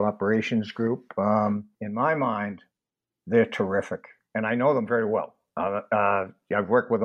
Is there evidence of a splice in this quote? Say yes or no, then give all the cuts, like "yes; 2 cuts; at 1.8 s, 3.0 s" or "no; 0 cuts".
no; 0 cuts